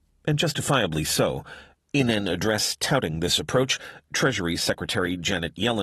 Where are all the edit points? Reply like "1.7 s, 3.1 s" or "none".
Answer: 1.7 s